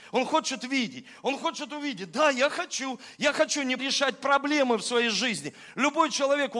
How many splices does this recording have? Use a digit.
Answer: 1